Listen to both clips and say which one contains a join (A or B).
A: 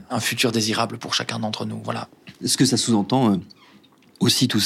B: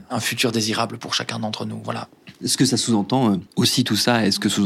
B